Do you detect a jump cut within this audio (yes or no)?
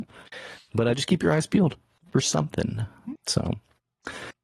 yes